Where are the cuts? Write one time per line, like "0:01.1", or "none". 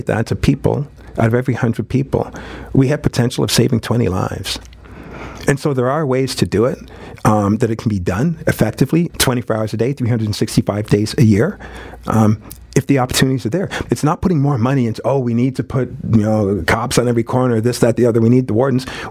0:09.1
0:13.9